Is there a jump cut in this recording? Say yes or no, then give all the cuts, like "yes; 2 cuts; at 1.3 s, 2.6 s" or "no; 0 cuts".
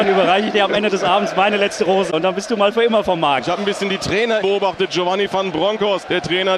yes; 1 cut; at 4.4 s